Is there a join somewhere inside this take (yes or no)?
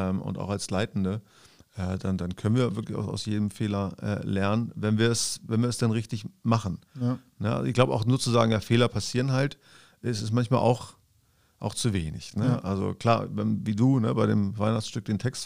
no